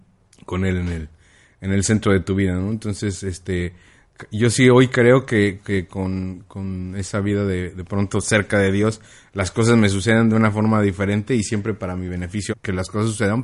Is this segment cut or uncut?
cut